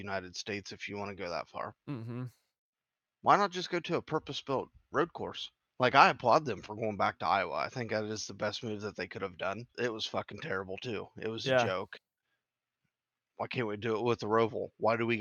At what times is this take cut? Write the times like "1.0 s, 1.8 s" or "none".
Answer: 9.7 s